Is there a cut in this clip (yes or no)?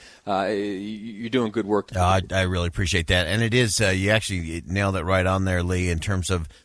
yes